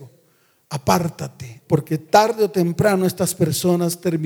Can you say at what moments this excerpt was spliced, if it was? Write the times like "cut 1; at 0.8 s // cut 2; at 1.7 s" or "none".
cut 1; at 1.6 s